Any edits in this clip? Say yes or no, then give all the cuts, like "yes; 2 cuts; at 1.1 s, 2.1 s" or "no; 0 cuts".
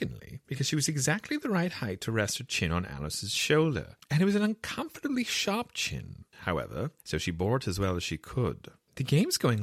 yes; 1 cut; at 7.0 s